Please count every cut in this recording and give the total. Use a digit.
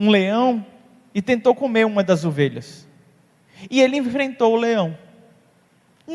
0